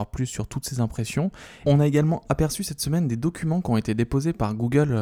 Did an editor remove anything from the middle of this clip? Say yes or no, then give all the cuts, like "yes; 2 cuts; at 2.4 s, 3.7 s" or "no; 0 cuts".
yes; 1 cut; at 1.6 s